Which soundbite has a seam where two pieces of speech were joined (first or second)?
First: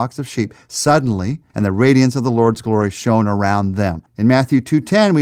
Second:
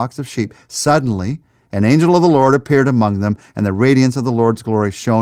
first